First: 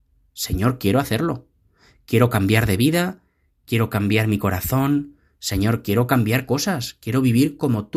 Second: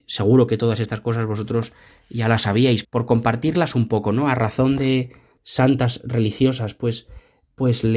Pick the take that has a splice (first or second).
second